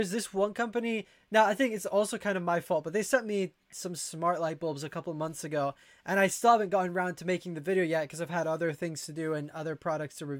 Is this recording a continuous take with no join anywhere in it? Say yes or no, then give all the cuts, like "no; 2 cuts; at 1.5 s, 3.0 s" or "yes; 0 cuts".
yes; 0 cuts